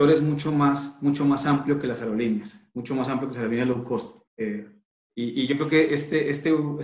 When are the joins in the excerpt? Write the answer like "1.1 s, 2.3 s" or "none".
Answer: 4.3 s